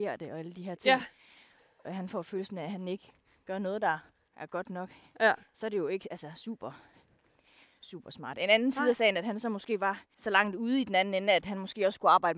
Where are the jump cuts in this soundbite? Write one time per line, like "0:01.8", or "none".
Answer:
none

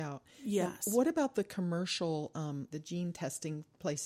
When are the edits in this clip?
0:02.7

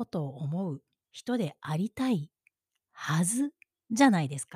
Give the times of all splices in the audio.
none

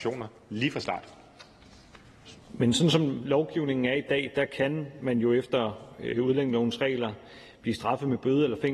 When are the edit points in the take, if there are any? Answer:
0:02.4

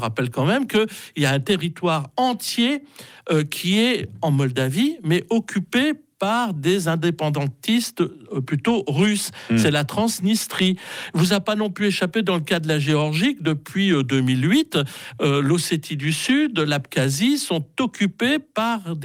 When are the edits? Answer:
none

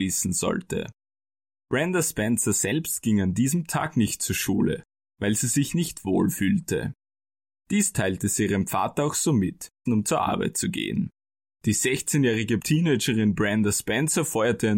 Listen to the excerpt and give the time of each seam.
0:09.9
0:11.5

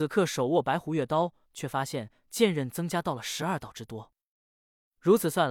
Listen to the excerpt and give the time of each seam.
0:01.4

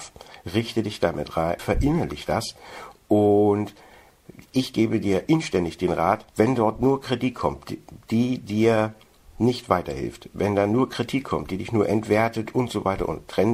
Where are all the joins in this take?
0:01.6
0:06.3

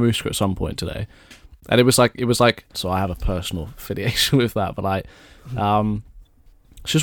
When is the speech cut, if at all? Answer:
0:02.7

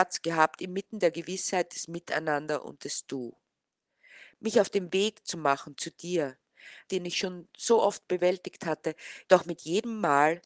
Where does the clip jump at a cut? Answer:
0:06.9
0:09.2

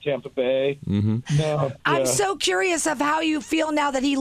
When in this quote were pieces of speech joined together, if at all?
0:01.2

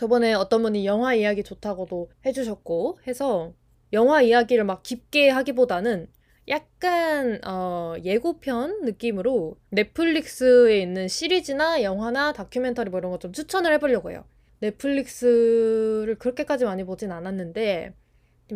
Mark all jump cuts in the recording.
0:14.5

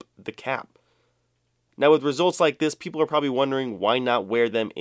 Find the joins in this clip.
none

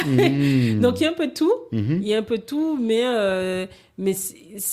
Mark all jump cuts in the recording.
none

